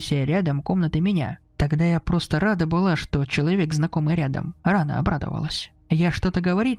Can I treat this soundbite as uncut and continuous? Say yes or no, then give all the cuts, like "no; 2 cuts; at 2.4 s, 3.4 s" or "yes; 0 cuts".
yes; 0 cuts